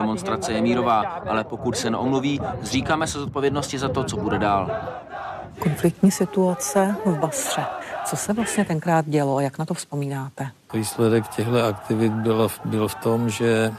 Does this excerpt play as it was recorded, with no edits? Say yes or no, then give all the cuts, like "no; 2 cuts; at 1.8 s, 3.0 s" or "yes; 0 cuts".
no; 1 cut; at 10.7 s